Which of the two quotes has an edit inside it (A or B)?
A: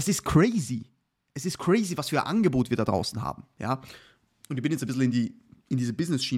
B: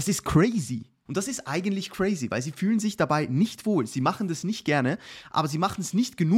B